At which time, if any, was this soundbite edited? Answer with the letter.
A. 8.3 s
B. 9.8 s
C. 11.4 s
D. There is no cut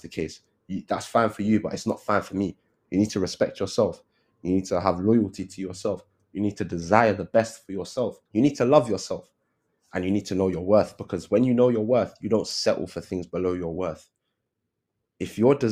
A